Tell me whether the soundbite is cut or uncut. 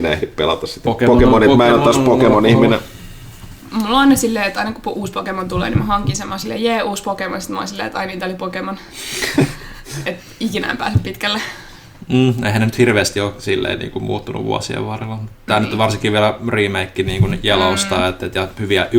uncut